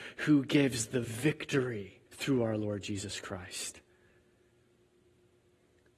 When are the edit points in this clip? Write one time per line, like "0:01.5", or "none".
0:02.1